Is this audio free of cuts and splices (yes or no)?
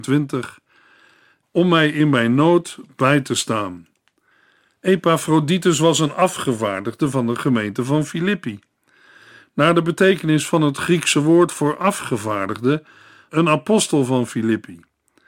no